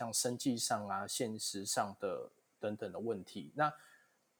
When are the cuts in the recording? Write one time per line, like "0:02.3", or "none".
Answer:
none